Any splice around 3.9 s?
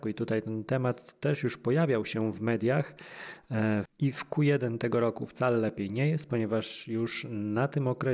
yes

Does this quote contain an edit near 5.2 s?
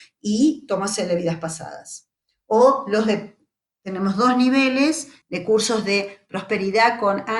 yes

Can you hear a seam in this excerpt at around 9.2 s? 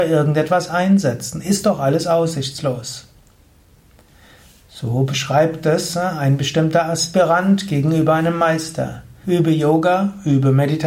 yes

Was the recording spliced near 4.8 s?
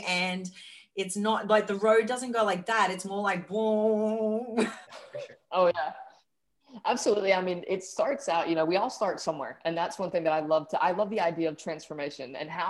yes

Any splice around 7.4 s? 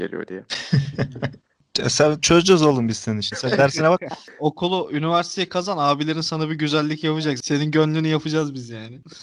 no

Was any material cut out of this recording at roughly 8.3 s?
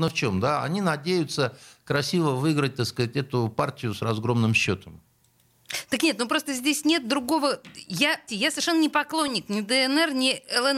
yes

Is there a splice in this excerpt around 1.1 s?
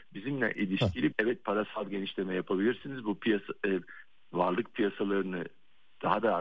yes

